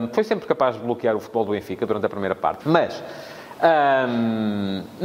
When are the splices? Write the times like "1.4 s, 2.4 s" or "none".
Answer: 2.6 s